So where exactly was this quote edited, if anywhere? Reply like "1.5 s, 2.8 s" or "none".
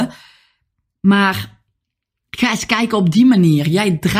none